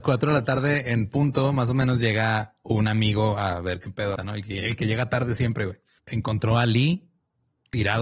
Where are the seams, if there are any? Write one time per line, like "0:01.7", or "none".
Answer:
0:04.2
0:06.0